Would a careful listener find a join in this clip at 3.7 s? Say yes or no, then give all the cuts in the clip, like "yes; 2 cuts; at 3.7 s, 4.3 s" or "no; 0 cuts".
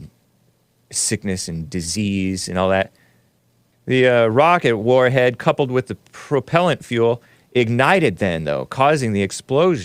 yes; 1 cut; at 3.7 s